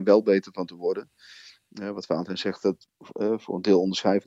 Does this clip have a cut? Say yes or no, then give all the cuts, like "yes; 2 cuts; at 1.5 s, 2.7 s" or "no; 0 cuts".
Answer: no; 0 cuts